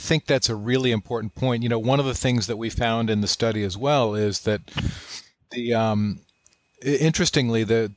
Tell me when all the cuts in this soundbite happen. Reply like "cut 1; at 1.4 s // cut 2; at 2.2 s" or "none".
none